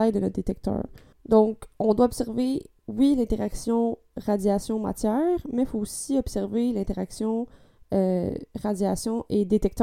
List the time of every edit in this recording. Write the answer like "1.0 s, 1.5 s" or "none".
1.1 s